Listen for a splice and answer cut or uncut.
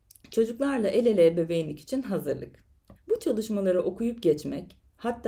cut